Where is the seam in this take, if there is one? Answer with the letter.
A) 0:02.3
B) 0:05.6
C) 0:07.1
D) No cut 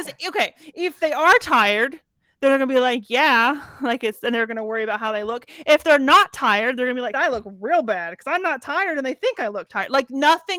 C